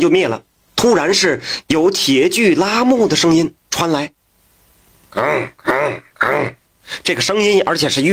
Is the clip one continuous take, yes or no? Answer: yes